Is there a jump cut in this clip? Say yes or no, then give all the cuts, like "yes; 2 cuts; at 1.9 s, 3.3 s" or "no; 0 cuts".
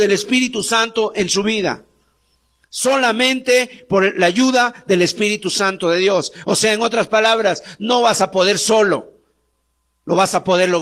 no; 0 cuts